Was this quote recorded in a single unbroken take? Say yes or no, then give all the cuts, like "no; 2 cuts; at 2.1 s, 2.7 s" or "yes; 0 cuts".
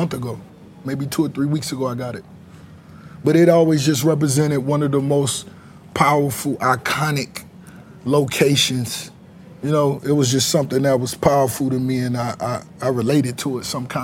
yes; 0 cuts